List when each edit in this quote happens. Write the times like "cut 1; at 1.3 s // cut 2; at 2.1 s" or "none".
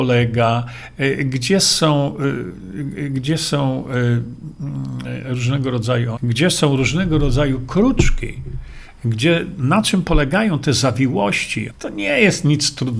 cut 1; at 6.2 s // cut 2; at 11.7 s